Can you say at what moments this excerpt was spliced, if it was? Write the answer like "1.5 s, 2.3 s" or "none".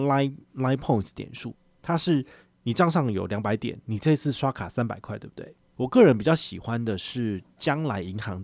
5.6 s